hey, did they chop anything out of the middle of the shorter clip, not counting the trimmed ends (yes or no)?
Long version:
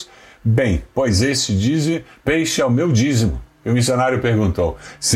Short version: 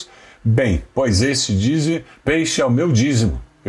no